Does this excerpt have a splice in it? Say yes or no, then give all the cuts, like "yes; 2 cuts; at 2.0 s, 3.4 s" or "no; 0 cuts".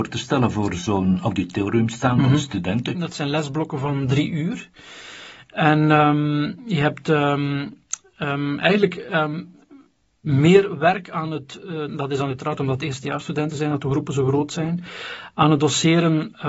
yes; 2 cuts; at 2.9 s, 11.9 s